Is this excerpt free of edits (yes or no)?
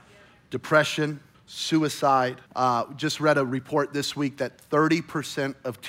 no